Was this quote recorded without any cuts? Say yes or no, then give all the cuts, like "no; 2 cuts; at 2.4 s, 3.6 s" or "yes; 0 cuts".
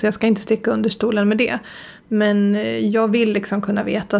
yes; 0 cuts